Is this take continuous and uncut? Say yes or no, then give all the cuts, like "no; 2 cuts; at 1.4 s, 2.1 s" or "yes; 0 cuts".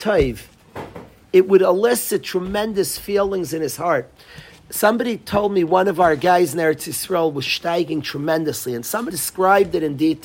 no; 2 cuts; at 1.2 s, 9.1 s